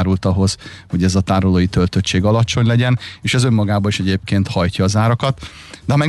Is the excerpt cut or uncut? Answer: uncut